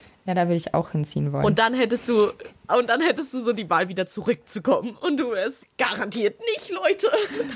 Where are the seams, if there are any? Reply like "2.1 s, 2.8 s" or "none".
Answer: 2.7 s, 5.6 s